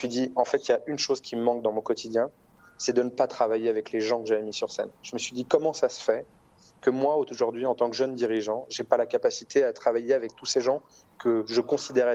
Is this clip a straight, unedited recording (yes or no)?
yes